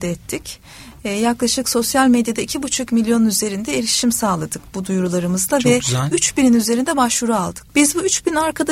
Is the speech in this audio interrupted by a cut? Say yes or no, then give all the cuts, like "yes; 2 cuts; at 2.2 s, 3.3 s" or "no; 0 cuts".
yes; 1 cut; at 7.7 s